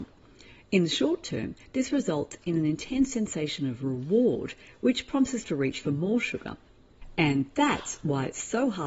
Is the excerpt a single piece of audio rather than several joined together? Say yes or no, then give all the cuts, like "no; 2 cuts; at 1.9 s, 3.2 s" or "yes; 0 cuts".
yes; 0 cuts